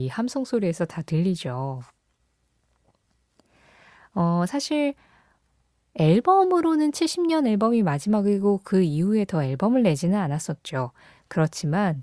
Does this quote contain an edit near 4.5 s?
yes; 1 cut; at 4.5 s

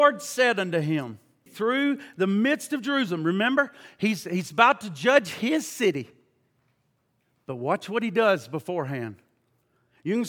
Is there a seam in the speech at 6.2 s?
no; 1 cut; at 1.5 s

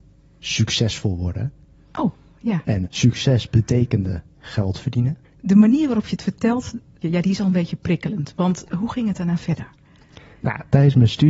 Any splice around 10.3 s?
no; 3 cuts; at 2.8 s, 5.3 s, 8.7 s

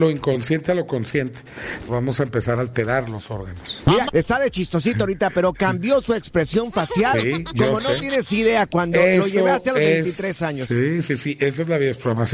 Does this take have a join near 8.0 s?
no; 2 cuts; at 1.9 s, 4.1 s

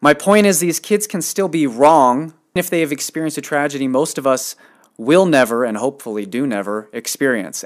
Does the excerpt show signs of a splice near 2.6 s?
yes; 1 cut; at 2.6 s

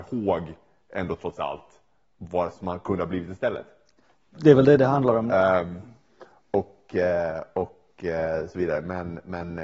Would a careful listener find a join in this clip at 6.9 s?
no; 0 cuts

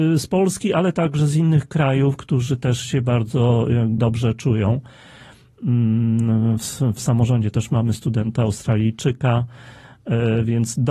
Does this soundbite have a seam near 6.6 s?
no; 1 cut; at 4.0 s

